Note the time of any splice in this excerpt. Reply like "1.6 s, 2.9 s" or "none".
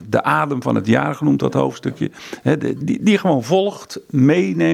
2.8 s